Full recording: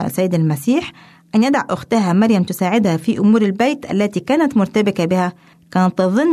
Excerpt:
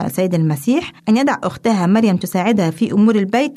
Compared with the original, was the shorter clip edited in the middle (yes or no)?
yes